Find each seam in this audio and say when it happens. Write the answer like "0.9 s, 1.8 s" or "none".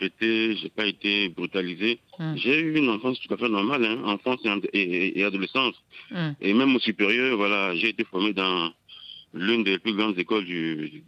2.1 s